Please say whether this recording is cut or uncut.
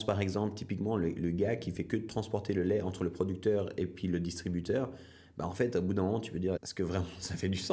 cut